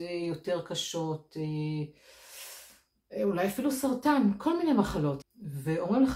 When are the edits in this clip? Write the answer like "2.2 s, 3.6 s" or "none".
5.2 s

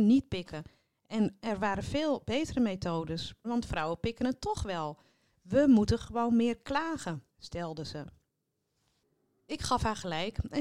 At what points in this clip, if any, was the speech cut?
3.4 s

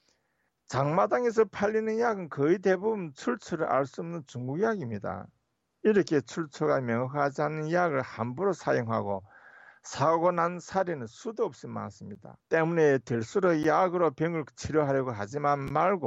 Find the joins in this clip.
12.4 s

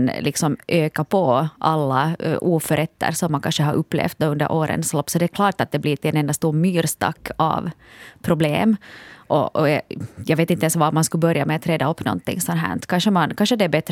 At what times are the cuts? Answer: none

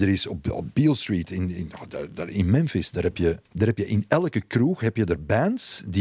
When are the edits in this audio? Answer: 3.4 s

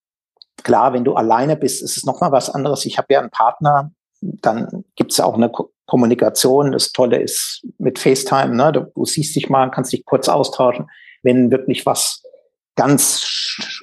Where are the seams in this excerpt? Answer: none

